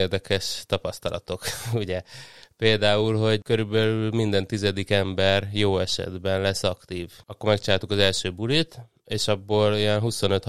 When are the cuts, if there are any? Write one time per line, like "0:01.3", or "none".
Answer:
0:07.2